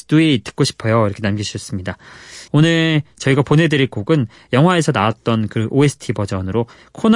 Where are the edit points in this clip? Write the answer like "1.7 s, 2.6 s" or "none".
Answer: 2.5 s